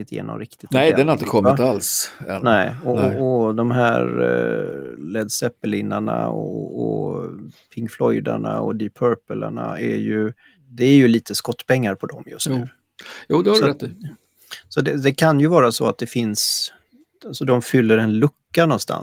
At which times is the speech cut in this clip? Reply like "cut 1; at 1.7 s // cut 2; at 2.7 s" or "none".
none